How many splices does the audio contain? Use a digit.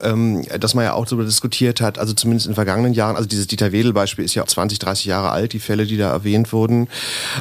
1